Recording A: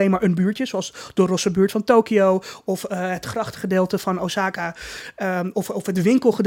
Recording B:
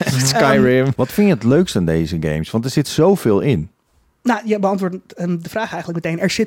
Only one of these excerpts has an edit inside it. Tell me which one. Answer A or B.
B